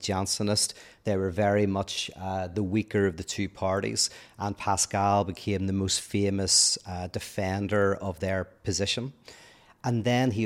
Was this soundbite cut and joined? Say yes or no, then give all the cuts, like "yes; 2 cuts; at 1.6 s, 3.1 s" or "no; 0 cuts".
no; 0 cuts